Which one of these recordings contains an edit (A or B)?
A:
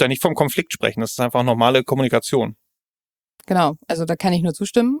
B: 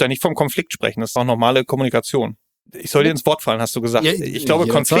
B